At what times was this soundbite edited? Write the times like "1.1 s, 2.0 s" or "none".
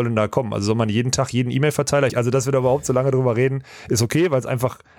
2.1 s